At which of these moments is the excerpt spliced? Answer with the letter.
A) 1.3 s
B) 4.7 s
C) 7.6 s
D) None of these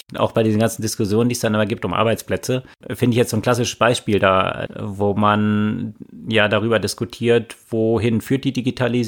B